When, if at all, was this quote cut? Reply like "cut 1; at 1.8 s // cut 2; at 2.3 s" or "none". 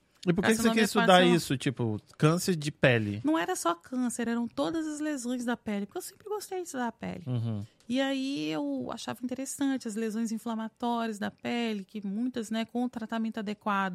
none